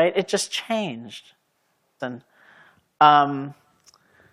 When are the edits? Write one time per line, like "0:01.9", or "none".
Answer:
0:02.0